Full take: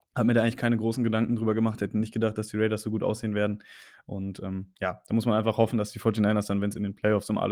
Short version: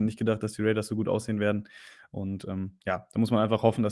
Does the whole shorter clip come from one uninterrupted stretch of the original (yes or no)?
yes